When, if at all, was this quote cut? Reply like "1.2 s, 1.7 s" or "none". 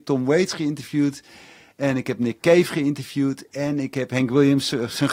none